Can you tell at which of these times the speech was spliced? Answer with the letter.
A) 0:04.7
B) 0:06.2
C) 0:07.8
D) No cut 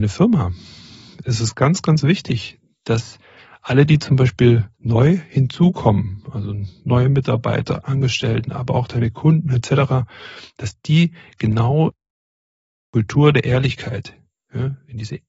A